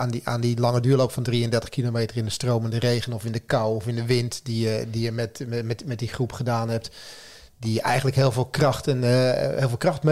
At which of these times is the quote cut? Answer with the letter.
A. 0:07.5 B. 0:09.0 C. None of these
C